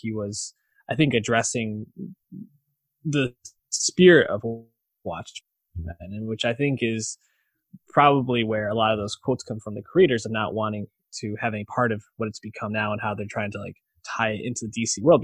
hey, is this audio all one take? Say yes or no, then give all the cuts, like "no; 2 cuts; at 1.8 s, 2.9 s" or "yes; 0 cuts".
yes; 0 cuts